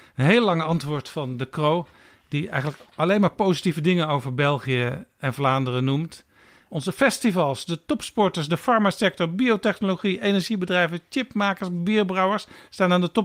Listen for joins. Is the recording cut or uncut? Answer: uncut